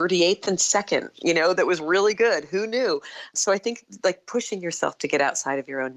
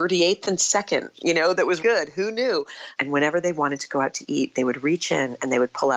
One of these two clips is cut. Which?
second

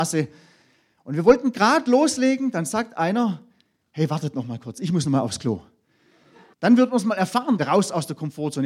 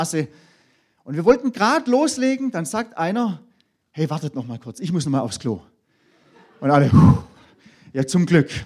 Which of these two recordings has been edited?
first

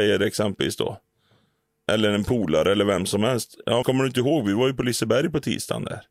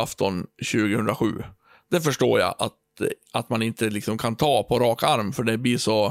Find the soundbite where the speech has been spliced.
first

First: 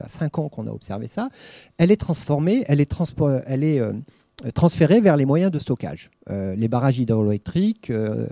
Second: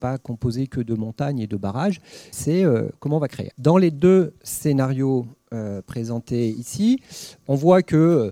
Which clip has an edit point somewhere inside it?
second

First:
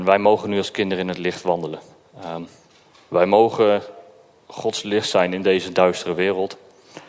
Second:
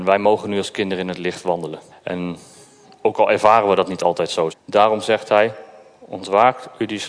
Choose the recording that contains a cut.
second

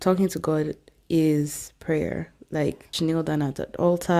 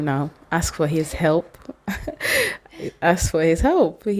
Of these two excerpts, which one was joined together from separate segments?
first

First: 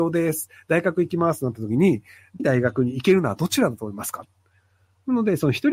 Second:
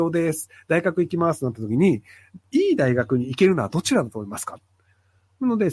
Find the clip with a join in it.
first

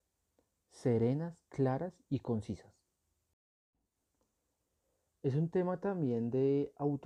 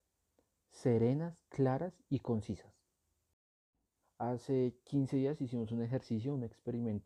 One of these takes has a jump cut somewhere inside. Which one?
second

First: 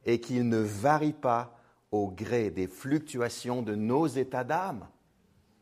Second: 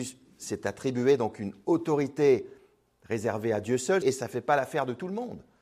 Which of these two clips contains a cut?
second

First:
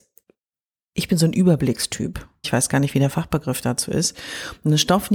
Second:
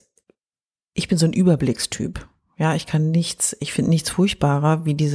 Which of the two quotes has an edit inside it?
first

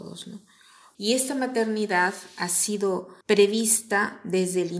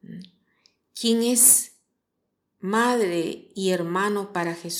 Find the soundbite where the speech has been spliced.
first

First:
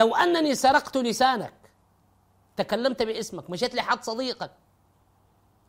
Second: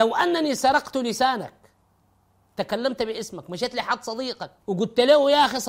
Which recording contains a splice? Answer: second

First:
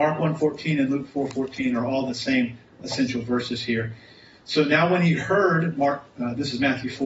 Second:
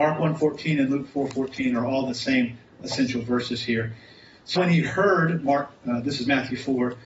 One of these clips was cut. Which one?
second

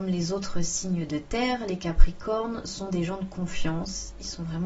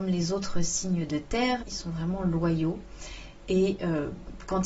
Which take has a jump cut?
second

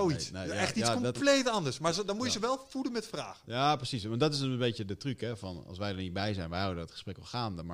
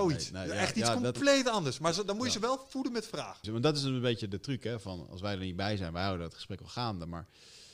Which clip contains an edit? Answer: second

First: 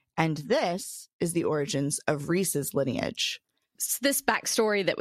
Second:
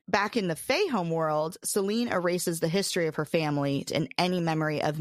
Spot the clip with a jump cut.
second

